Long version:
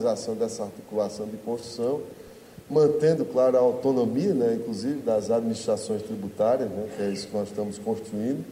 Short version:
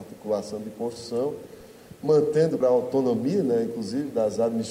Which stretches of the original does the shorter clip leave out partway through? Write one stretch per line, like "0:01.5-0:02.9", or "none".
0:03.3-0:03.5